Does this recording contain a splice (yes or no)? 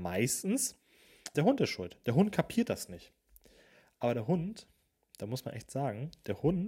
yes